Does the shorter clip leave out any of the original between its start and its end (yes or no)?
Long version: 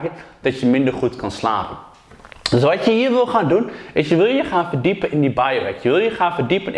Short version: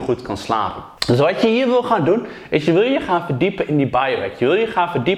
yes